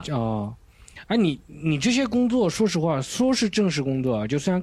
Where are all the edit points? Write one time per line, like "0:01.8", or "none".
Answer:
none